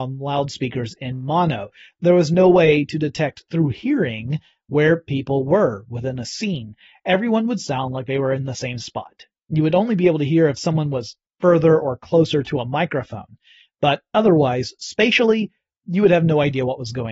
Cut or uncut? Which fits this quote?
uncut